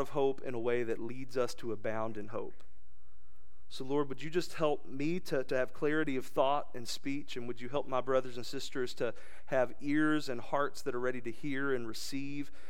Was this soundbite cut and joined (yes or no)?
no